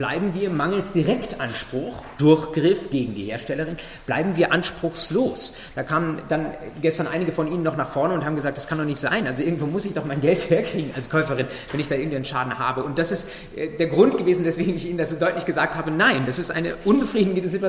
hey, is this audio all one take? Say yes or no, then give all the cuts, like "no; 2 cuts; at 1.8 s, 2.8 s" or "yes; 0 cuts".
yes; 0 cuts